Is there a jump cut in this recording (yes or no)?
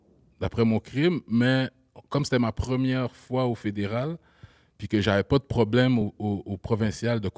no